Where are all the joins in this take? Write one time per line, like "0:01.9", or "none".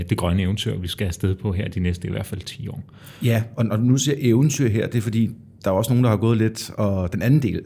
none